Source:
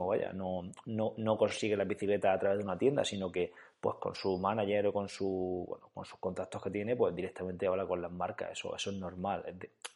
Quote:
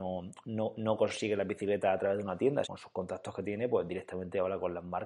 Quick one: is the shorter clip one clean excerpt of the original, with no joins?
no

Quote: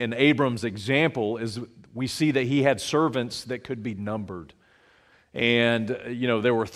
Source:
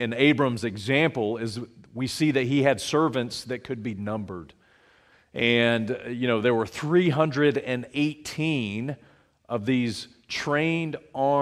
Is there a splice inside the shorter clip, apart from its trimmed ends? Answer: no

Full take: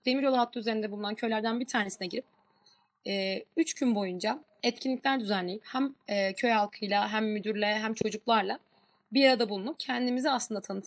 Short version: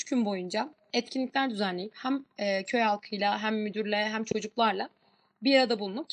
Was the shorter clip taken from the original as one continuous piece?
yes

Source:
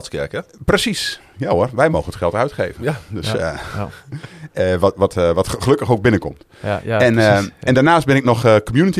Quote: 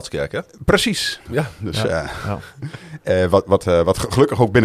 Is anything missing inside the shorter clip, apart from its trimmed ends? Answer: yes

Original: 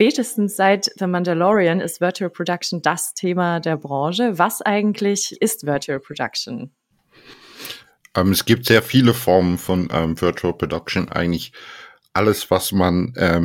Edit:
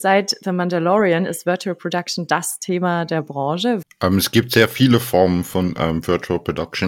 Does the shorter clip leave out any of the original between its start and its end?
yes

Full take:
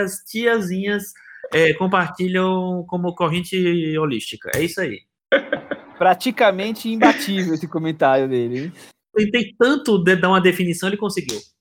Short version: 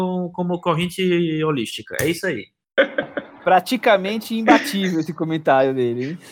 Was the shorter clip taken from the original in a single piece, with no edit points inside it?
yes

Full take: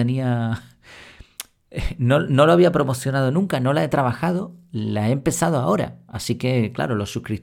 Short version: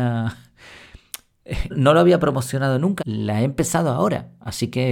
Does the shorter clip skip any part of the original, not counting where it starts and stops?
yes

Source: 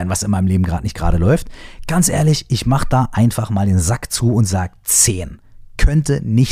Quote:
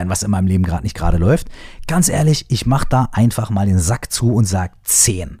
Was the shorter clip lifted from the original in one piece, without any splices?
yes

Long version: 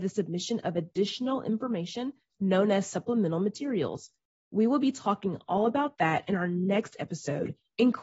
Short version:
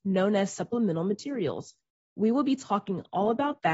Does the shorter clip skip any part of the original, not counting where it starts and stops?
no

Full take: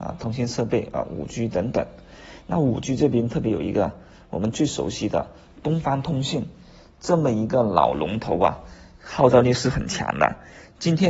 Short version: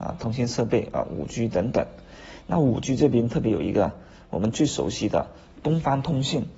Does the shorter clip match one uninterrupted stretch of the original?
yes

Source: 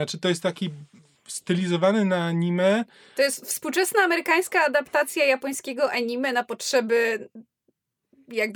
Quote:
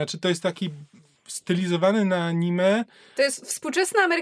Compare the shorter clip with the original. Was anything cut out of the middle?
no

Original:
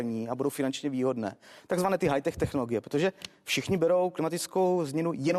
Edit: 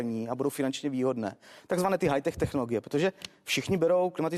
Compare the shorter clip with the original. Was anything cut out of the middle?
no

